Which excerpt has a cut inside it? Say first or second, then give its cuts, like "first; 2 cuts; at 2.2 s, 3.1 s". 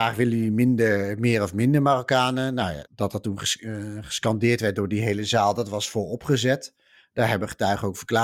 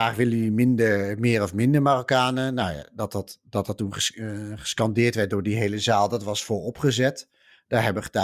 first; 1 cut; at 2.9 s